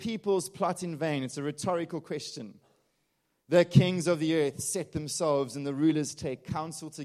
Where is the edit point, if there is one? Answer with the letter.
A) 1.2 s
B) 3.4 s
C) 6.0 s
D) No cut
D